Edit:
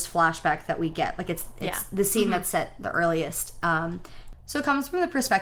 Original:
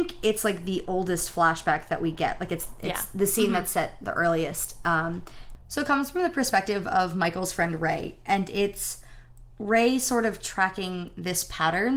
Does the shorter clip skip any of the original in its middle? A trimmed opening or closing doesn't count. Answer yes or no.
no